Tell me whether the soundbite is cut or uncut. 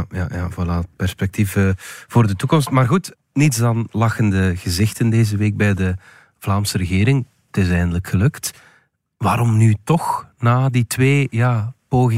uncut